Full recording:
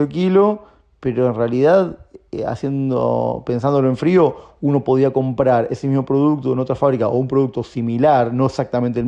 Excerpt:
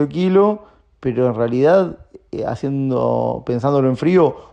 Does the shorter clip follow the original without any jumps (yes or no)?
yes